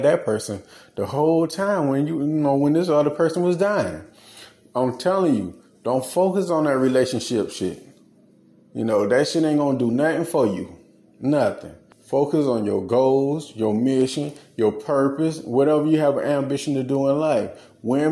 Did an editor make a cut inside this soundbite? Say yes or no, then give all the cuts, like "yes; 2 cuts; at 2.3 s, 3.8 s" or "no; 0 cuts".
yes; 1 cut; at 11.9 s